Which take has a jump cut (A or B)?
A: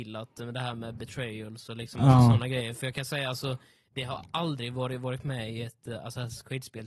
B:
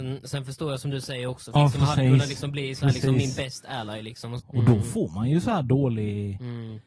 B